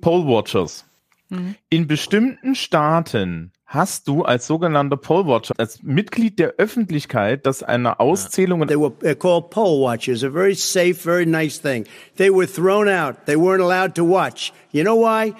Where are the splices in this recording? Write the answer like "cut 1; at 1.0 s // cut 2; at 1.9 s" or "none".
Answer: cut 1; at 5.5 s // cut 2; at 8.7 s